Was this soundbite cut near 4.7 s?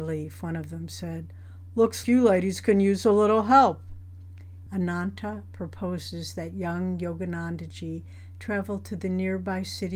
yes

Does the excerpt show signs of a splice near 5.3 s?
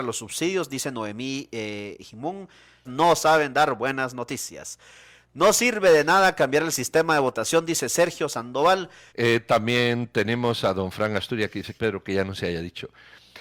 no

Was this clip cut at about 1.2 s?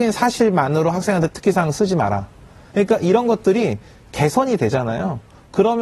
no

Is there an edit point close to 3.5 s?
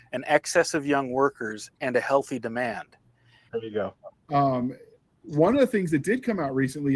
yes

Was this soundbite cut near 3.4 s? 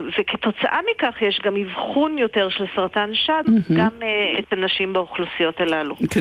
yes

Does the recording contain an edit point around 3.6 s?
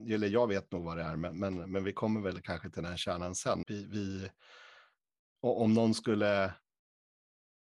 yes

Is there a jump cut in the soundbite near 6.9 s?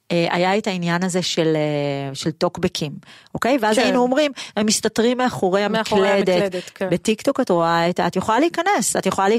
no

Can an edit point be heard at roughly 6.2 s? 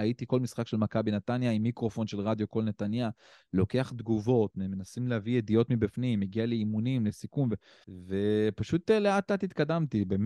no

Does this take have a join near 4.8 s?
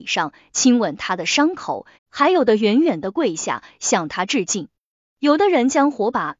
no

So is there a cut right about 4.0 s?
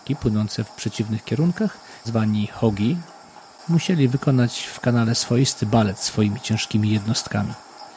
no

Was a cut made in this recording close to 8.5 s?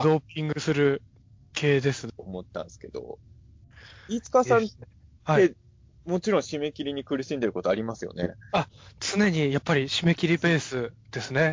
no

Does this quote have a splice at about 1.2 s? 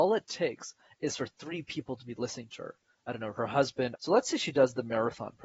no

